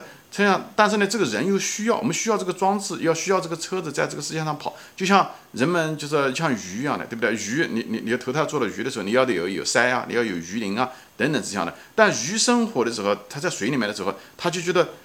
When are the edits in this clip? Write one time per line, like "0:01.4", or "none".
none